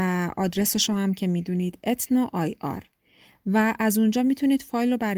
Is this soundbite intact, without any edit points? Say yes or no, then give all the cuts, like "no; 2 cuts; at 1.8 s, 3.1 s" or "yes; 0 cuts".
yes; 0 cuts